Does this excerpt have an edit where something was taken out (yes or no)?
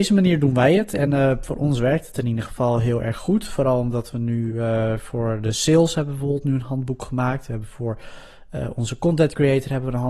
no